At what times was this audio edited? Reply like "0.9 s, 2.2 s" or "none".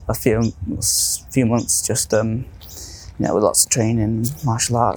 none